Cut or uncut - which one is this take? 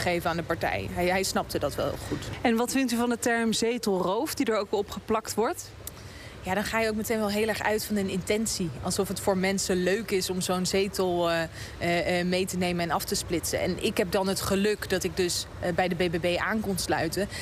uncut